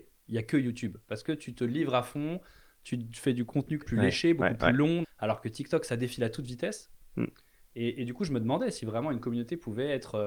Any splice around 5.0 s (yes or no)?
yes